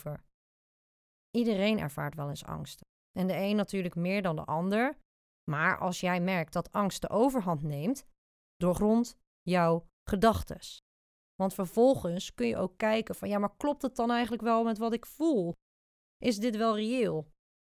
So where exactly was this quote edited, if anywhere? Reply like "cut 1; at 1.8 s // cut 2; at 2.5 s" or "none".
none